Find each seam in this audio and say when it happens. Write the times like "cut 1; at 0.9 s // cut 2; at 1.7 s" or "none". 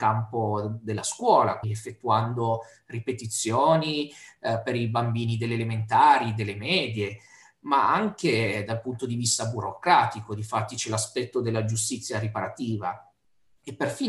cut 1; at 1.6 s